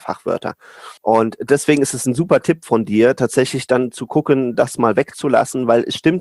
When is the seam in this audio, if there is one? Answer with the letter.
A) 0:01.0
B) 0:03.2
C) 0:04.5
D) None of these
A